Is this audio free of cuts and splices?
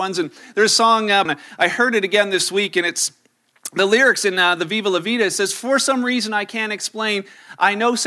no; 1 cut; at 1.3 s

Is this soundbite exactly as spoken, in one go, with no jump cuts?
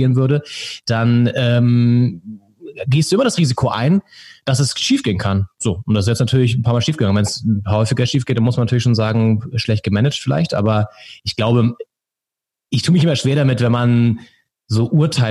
yes; 0 cuts

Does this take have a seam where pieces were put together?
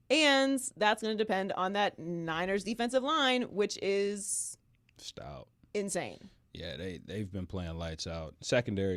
no; 0 cuts

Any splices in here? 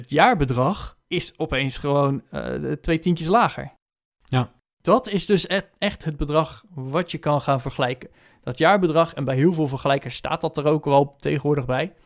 yes; 1 cut; at 1.0 s

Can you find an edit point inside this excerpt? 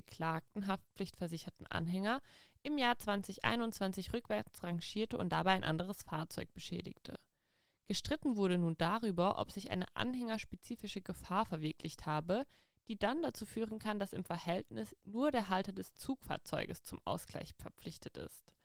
no; 0 cuts

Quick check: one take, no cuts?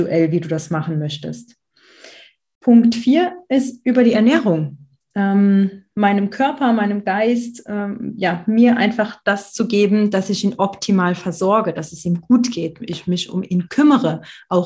yes; 0 cuts

